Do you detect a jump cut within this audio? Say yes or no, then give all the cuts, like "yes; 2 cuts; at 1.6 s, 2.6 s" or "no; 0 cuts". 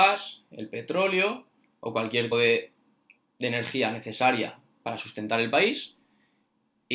yes; 1 cut; at 2.3 s